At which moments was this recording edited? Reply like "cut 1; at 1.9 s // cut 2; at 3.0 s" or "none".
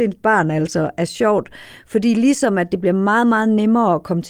none